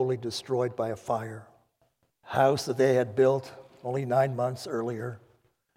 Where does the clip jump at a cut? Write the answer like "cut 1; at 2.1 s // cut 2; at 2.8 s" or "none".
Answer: cut 1; at 2.1 s

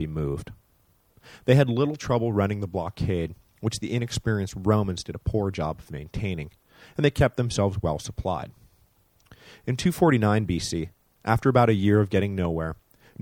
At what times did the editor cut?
none

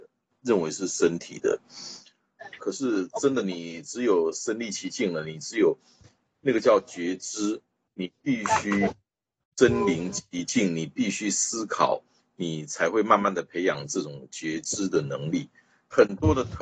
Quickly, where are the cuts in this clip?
cut 1; at 2.6 s

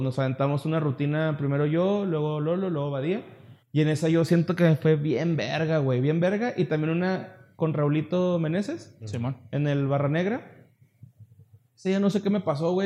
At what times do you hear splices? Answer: cut 1; at 3.6 s

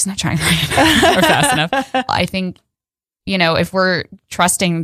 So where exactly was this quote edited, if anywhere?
cut 1; at 2.1 s

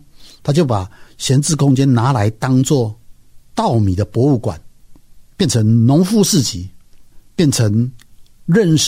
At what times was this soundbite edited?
none

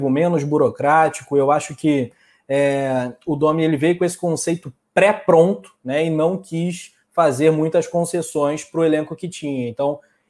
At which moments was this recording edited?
none

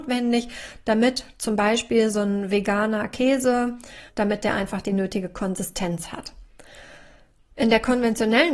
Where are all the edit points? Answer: cut 1; at 4.1 s

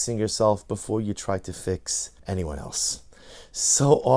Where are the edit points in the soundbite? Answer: cut 1; at 2.2 s

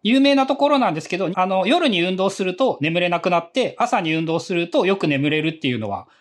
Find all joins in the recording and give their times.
cut 1; at 1.3 s

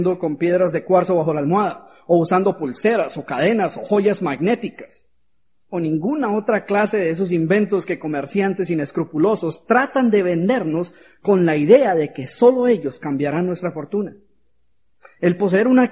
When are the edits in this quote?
none

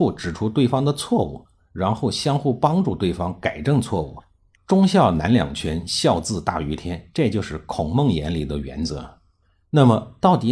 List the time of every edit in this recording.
cut 1; at 4.5 s

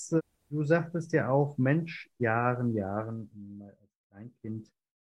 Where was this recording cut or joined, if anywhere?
cut 1; at 2.2 s

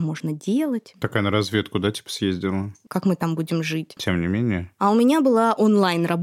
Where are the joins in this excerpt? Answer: cut 1; at 2.9 s // cut 2; at 4.0 s

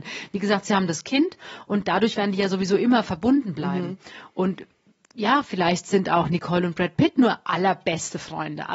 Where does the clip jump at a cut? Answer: none

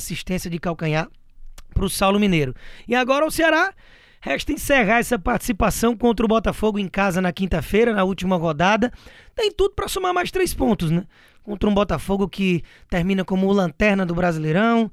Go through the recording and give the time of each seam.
none

